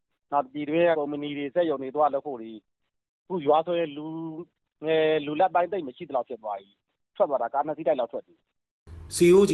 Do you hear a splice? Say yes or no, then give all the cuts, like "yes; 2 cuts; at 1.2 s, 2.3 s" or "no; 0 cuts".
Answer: yes; 1 cut; at 0.9 s